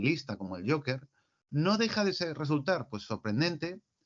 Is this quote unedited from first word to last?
yes; 0 cuts

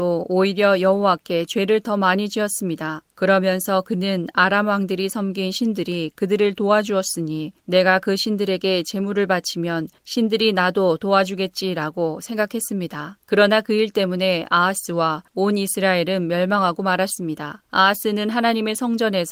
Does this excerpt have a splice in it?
yes; 1 cut; at 3.1 s

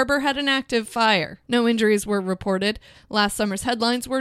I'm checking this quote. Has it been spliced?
yes; 2 cuts; at 1.4 s, 2.9 s

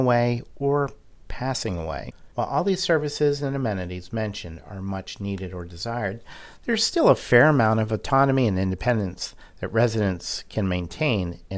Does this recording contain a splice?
yes; 1 cut; at 2.3 s

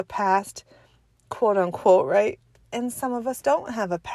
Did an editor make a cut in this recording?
no; 0 cuts

